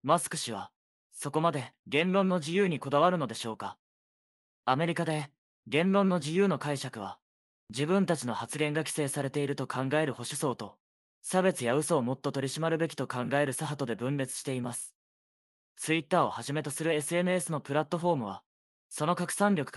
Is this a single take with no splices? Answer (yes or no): yes